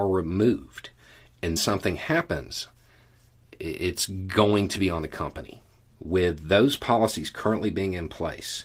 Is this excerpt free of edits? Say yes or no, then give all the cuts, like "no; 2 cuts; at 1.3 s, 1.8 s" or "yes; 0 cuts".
no; 2 cuts; at 1.6 s, 5.9 s